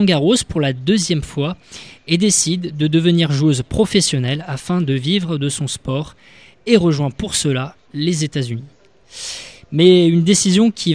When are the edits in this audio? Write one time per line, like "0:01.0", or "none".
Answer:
none